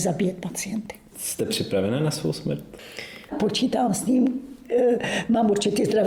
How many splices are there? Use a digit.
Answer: 1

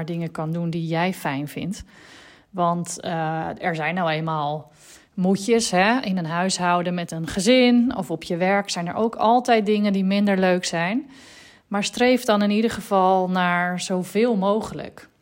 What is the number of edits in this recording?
0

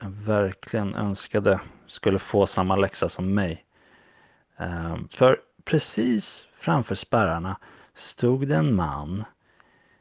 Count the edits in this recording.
1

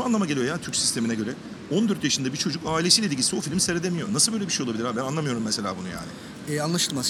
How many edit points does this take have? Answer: 0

